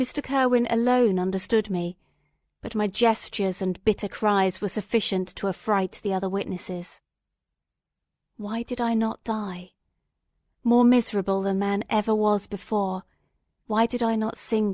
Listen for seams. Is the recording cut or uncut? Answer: uncut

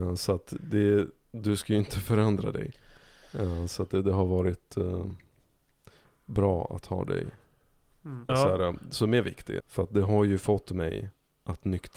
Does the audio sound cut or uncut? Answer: cut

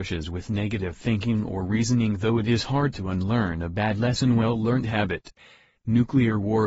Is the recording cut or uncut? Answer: cut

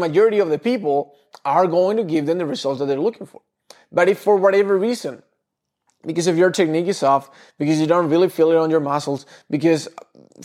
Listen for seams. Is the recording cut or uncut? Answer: uncut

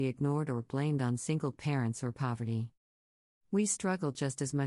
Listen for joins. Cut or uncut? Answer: uncut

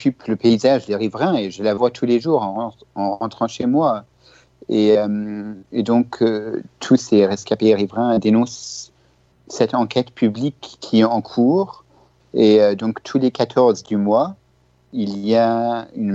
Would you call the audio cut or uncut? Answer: cut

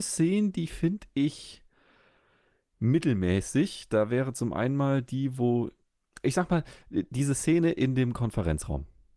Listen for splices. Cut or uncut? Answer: uncut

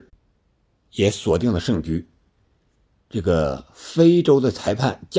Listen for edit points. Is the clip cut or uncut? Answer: cut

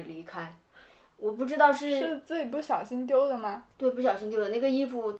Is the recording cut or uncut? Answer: uncut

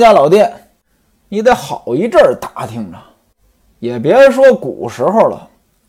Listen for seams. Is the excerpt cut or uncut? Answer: uncut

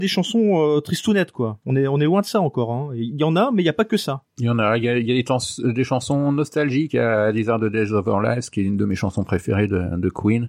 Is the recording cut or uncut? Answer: uncut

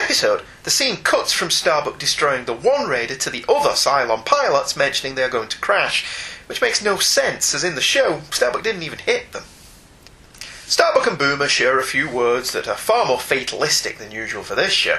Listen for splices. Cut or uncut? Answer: uncut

